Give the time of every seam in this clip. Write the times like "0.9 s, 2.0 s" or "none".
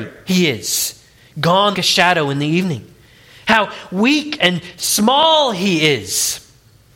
1.7 s